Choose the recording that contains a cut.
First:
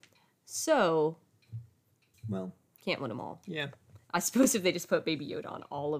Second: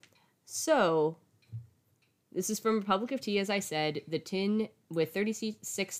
first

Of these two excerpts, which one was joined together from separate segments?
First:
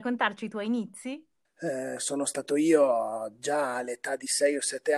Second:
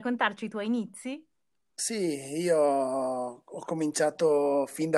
first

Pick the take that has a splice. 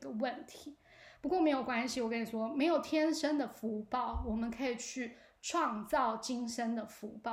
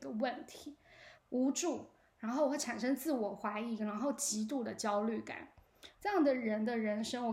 second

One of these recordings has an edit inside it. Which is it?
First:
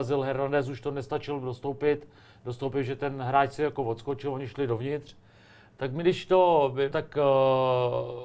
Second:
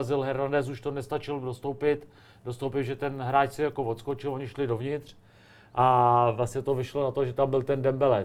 first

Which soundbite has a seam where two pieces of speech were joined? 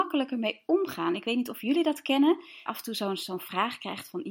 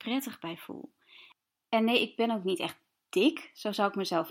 first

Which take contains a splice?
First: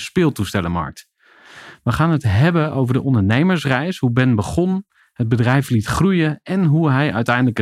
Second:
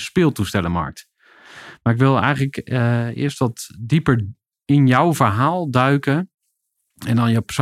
second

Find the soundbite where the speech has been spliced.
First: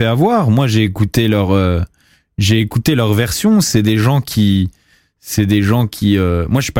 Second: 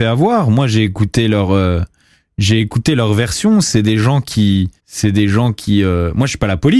second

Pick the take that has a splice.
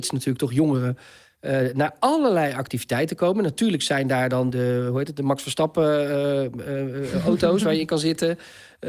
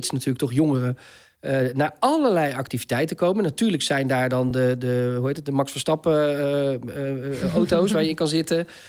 first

